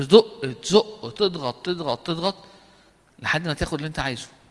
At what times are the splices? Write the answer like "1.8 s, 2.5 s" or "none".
1.1 s